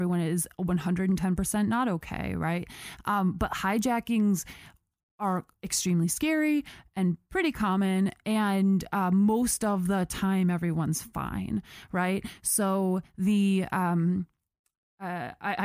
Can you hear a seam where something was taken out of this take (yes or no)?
no